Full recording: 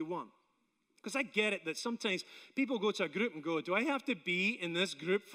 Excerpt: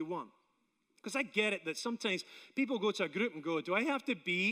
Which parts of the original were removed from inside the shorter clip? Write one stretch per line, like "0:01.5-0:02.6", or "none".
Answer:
none